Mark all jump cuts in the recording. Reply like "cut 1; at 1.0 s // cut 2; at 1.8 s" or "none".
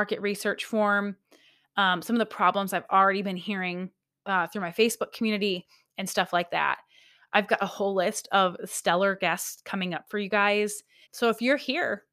cut 1; at 11.0 s